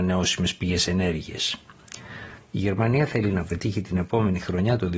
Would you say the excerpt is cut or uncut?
cut